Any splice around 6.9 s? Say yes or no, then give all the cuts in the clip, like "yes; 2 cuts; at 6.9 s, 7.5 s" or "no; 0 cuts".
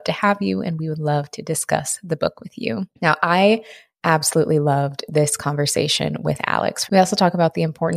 yes; 2 cuts; at 3.0 s, 6.9 s